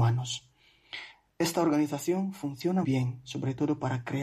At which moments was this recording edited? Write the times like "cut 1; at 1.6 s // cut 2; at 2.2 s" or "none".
cut 1; at 2.8 s